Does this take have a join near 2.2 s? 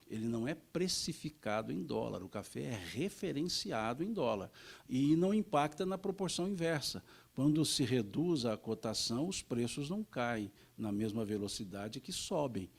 no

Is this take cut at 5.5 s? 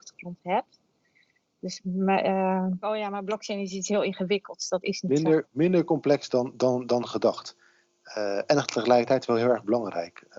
no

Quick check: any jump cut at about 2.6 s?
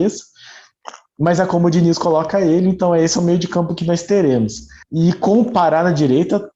no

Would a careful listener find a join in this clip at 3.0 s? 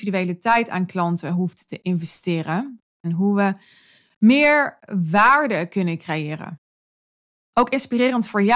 yes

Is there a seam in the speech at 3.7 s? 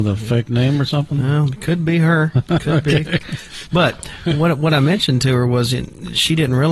yes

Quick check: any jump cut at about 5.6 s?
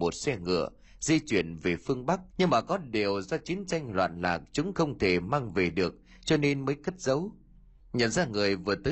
no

